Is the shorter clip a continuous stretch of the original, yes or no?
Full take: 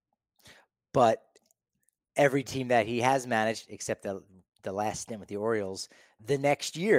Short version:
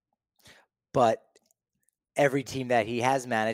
yes